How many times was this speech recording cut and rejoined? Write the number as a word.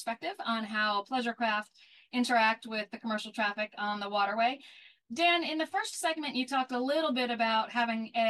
zero